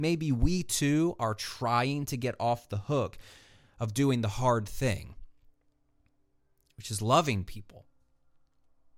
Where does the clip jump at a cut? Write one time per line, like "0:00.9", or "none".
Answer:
none